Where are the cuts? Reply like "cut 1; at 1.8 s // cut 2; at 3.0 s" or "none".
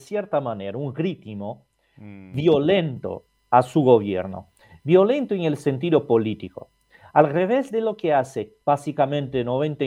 cut 1; at 8.6 s